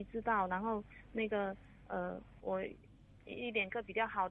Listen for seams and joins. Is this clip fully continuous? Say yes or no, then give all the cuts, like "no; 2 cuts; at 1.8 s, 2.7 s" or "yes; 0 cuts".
no; 1 cut; at 2.4 s